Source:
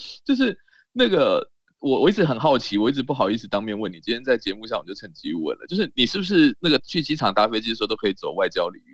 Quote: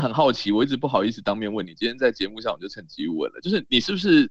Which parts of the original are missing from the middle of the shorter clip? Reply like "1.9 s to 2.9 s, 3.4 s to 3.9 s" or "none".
none